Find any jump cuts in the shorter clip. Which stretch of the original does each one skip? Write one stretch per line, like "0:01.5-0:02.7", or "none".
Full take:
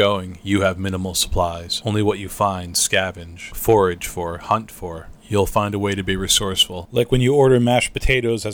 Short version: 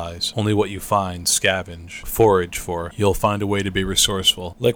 0:04.4-0:05.2